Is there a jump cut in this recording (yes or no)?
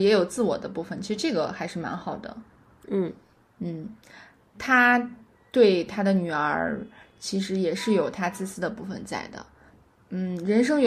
yes